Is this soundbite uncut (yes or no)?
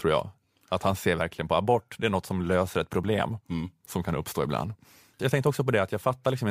no